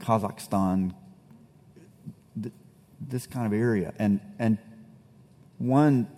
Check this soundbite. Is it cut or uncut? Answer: uncut